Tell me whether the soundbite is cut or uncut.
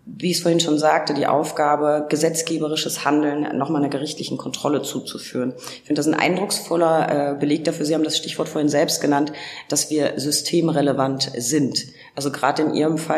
uncut